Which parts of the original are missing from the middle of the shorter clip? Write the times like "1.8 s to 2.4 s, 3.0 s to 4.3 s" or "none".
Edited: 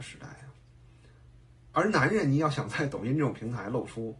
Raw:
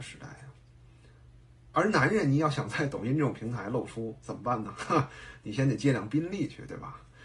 none